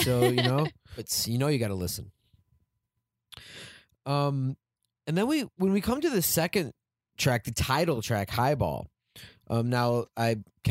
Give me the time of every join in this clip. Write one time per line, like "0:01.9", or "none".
0:01.0